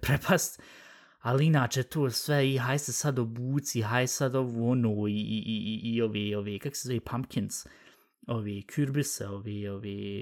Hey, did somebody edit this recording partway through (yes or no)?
no